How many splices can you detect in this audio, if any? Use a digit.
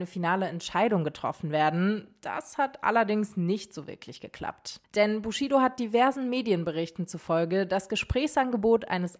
0